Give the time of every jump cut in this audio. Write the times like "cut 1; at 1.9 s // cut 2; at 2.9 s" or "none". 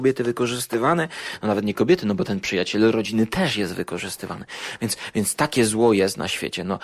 none